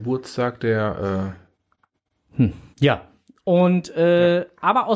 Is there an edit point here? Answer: yes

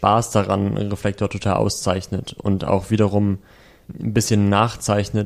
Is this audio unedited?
yes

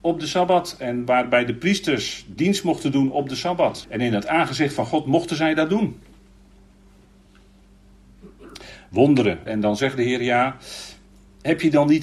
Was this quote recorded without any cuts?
no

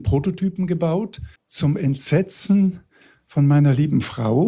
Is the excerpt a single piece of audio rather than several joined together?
no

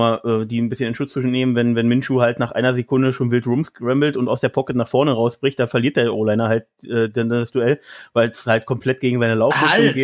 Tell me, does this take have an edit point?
no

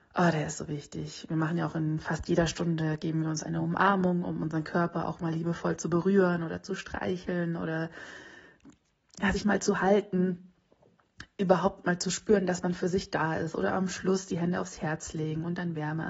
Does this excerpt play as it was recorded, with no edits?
yes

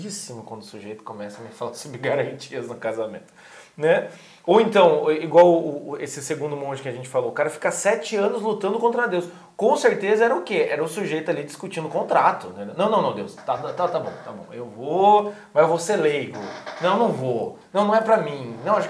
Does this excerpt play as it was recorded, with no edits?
yes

